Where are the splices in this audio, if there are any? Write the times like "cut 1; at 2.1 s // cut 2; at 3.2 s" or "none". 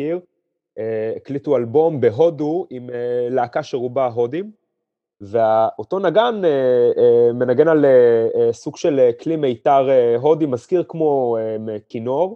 cut 1; at 5.1 s